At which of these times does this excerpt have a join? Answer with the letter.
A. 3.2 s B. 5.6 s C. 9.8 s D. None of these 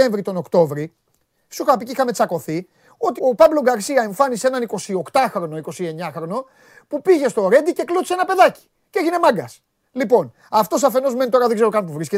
A